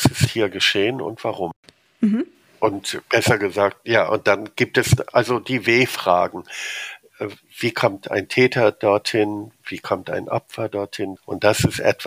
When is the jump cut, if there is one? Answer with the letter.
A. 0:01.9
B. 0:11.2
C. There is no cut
B